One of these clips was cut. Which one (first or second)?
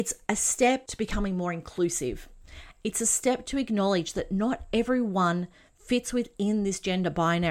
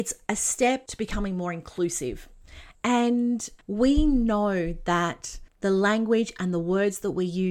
second